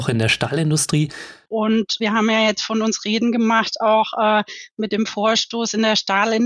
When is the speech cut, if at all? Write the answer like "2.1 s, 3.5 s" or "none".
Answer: 1.5 s